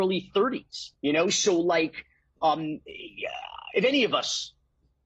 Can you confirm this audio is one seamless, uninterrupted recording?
no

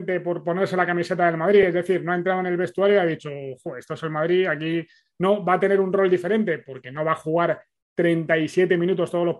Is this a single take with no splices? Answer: yes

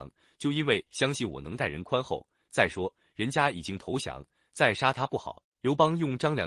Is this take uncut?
no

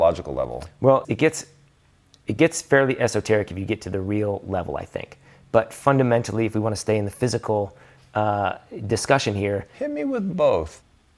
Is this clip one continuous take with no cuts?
no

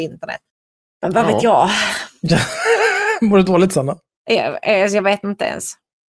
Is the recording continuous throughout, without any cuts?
yes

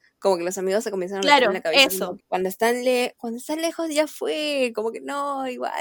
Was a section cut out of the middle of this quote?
yes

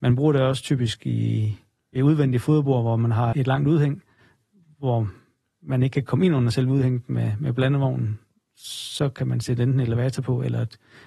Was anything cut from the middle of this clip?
yes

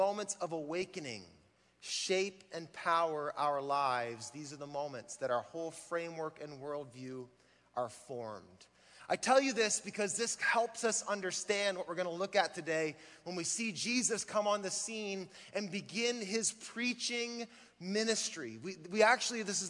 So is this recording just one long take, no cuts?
yes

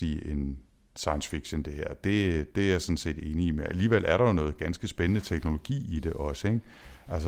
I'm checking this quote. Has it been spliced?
no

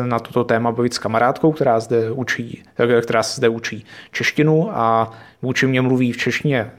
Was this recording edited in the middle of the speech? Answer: no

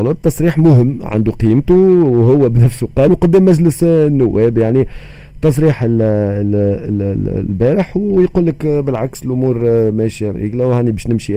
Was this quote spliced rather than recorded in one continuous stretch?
yes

